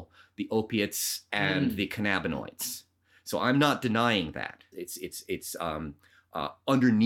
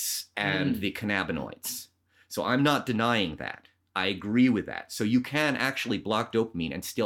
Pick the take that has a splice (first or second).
first